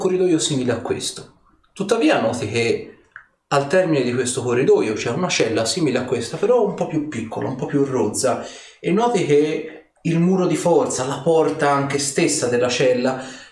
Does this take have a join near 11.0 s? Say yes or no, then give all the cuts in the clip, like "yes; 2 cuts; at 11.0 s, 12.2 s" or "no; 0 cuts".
no; 0 cuts